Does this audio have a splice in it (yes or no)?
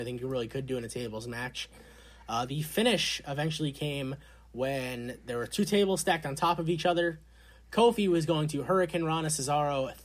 no